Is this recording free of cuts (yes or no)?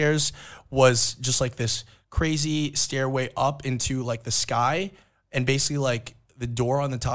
yes